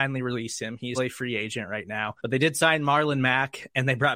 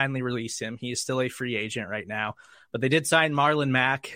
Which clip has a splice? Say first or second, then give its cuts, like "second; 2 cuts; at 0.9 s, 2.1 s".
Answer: first; 2 cuts; at 1.0 s, 2.2 s